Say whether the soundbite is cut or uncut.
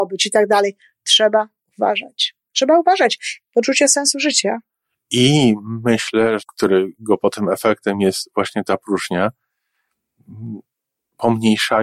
cut